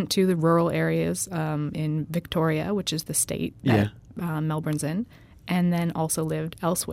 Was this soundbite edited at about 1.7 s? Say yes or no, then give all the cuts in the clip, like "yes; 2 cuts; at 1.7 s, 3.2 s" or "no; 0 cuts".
no; 0 cuts